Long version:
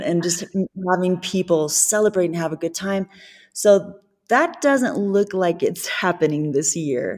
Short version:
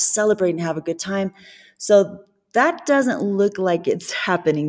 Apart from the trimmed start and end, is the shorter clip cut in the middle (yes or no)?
no